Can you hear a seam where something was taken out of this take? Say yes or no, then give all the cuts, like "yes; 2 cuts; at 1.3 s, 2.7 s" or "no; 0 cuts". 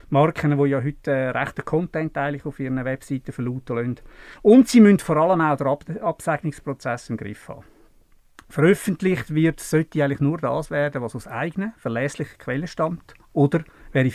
no; 0 cuts